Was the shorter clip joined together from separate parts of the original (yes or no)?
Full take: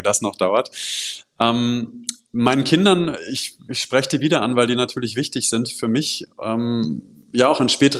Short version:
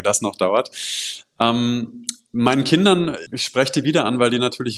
yes